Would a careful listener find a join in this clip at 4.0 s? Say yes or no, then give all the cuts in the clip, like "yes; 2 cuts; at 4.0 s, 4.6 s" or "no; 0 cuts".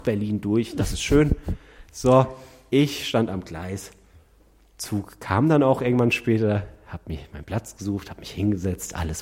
no; 0 cuts